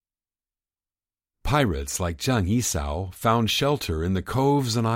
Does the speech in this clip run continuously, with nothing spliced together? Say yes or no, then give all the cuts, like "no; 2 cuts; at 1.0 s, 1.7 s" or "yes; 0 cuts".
no; 1 cut; at 1.3 s